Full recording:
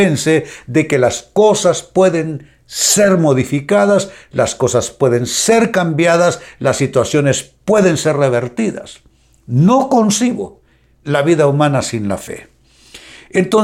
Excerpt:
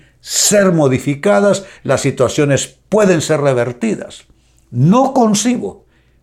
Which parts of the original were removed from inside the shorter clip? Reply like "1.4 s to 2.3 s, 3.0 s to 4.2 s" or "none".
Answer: 4.2 s to 6.5 s